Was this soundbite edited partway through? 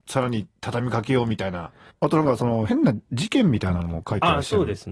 yes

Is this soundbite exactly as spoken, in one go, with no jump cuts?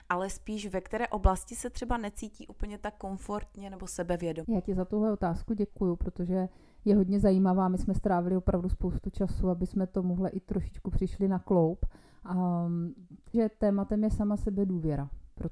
no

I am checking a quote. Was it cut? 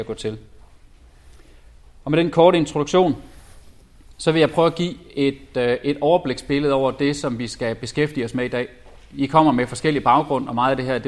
no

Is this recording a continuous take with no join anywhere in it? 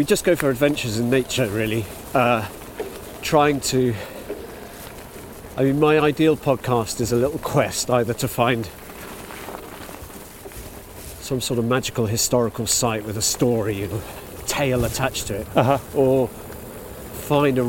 yes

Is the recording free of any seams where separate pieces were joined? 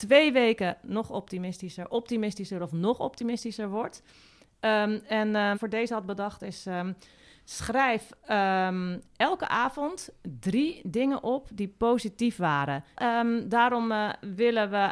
no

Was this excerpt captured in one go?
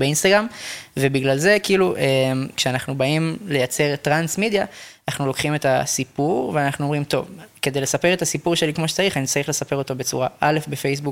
yes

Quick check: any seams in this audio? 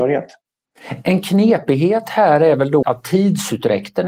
yes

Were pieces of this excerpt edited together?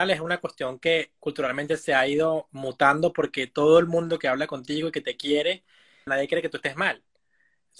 yes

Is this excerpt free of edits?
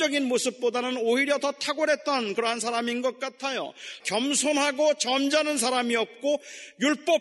no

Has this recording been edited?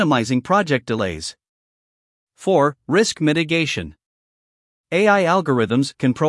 no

